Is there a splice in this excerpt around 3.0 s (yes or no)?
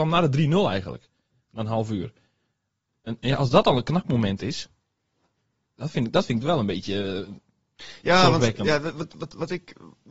no